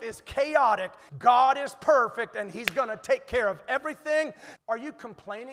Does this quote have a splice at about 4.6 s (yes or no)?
yes